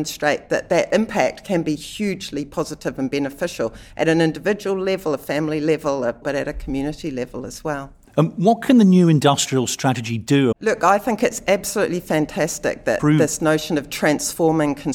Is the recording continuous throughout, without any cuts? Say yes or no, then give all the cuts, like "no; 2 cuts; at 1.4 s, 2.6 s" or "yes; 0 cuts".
no; 2 cuts; at 6.2 s, 10.5 s